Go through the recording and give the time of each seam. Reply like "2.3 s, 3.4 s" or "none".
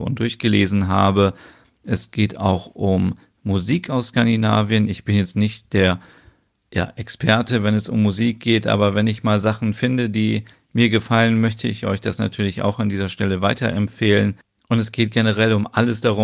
none

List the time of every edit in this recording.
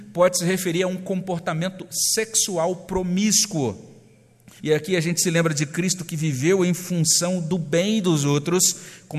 4.6 s

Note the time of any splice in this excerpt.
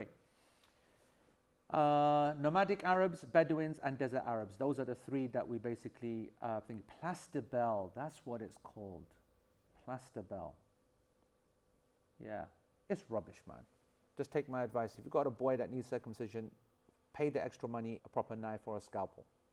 18.0 s

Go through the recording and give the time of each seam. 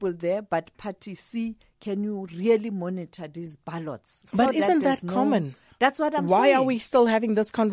none

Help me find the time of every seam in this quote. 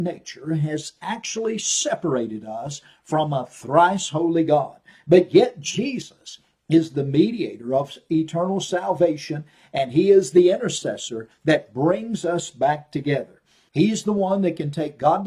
13.7 s

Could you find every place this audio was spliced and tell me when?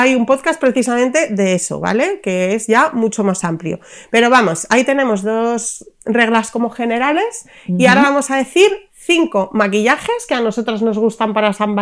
none

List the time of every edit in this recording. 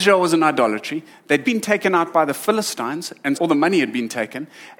1.4 s, 3.3 s

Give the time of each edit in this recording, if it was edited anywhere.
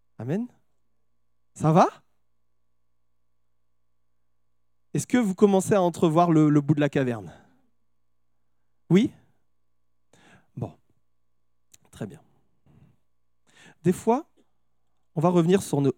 none

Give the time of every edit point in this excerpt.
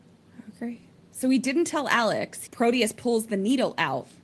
1.0 s, 2.5 s

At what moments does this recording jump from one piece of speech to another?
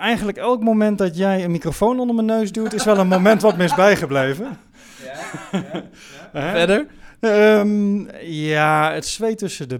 none

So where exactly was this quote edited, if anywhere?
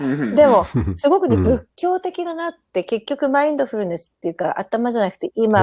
none

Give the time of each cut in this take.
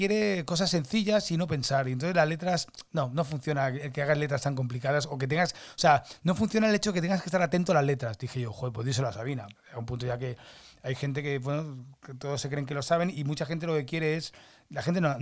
9.6 s

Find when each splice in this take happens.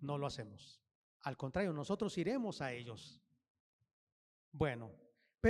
1.1 s

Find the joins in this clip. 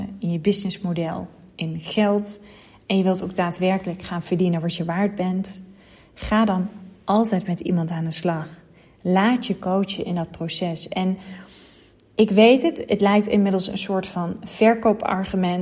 none

